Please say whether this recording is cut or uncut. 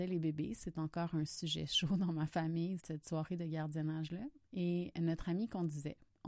cut